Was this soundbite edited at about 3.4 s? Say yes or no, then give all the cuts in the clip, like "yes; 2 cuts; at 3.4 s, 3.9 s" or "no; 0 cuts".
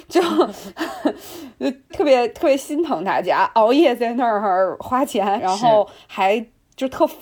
no; 2 cuts; at 1.9 s, 5.4 s